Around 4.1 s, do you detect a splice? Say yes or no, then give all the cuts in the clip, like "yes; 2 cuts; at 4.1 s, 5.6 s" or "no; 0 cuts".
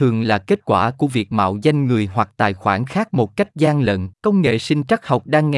yes; 1 cut; at 4.1 s